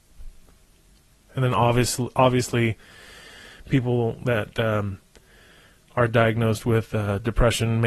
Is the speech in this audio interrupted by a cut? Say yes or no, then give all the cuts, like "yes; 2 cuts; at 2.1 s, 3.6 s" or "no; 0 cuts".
no; 0 cuts